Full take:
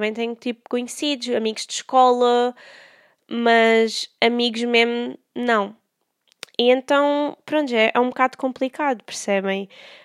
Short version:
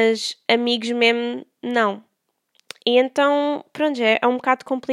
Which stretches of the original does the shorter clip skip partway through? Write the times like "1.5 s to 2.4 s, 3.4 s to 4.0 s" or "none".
none